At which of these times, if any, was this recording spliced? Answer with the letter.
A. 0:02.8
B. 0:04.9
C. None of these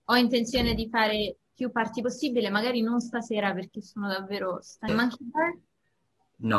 B